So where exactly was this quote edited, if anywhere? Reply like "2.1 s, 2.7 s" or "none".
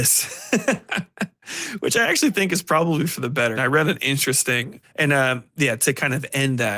3.5 s, 4.8 s